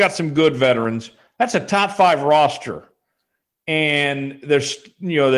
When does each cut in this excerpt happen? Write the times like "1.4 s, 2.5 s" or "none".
none